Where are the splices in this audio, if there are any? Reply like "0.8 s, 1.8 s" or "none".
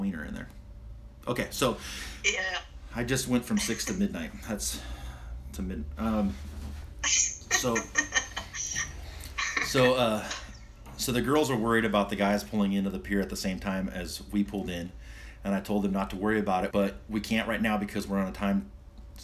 16.7 s